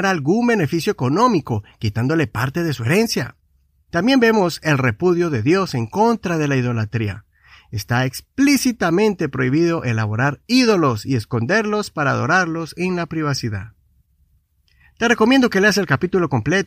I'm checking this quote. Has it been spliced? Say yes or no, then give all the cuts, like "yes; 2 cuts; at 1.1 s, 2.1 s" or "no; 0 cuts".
no; 0 cuts